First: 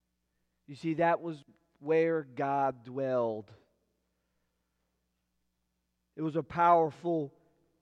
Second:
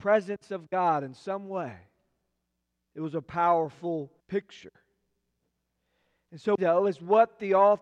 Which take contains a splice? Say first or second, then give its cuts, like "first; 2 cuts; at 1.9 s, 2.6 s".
second; 3 cuts; at 2.9 s, 4.2 s, 6.6 s